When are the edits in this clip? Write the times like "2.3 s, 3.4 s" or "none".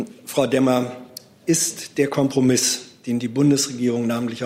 none